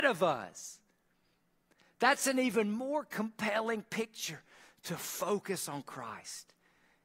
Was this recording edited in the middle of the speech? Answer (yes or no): no